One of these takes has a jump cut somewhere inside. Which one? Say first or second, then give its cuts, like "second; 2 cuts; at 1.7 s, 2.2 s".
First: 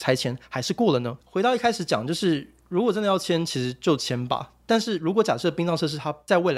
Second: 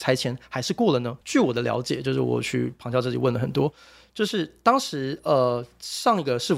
first; 1 cut; at 1.2 s